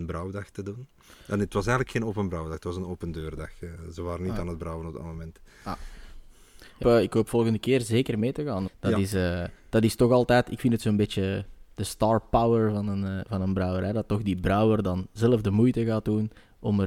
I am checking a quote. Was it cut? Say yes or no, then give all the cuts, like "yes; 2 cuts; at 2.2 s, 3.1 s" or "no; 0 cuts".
yes; 2 cuts; at 6.8 s, 8.7 s